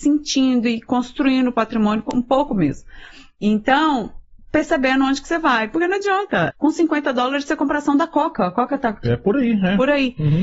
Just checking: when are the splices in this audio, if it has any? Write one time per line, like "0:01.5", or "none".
0:06.5